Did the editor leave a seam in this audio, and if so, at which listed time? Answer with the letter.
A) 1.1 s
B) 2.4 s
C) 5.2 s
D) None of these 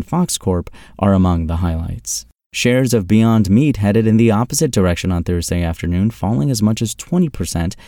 B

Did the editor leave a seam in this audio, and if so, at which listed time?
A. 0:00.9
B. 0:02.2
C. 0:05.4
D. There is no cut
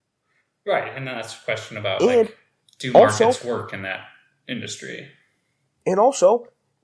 D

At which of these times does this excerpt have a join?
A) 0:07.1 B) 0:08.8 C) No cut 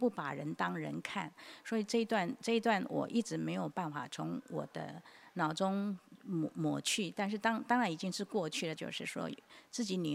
B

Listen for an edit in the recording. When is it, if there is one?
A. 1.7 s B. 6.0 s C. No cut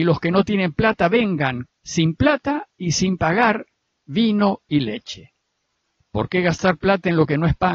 A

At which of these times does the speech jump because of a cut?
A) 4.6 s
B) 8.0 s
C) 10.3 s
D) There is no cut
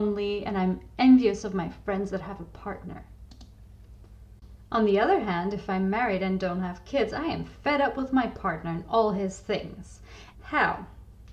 C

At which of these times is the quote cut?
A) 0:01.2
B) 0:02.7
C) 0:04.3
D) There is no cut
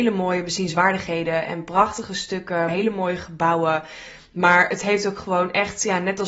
B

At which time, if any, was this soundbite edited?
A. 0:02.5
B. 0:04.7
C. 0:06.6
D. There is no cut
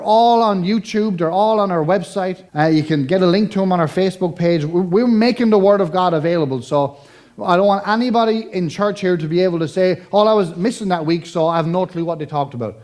A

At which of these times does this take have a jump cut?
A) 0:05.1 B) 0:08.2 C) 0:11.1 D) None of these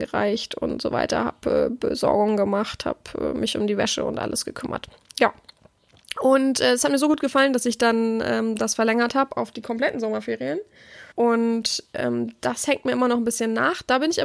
C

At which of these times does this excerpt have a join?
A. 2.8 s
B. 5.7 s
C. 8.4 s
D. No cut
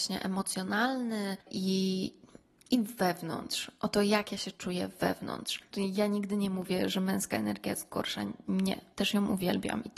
B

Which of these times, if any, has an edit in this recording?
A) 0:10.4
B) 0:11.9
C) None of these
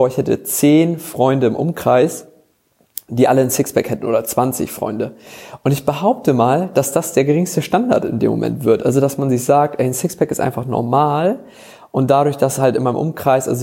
C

